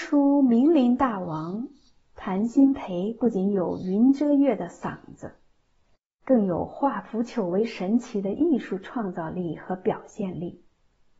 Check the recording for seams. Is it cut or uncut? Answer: uncut